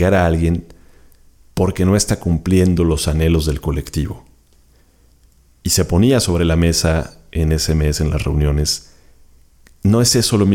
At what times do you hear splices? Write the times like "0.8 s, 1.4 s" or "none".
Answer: none